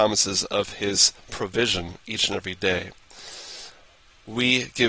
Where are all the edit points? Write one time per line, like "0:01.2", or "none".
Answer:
none